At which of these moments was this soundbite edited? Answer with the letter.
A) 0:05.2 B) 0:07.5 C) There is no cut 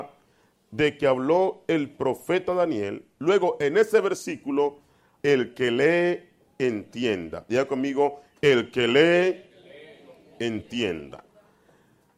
A